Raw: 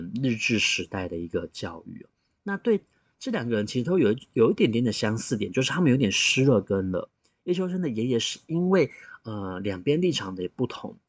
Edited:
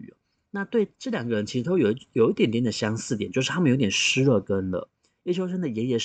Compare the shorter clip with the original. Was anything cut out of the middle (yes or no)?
yes